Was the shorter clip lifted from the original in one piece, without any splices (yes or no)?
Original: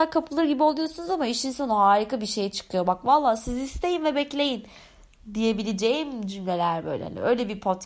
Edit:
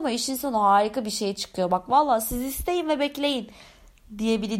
yes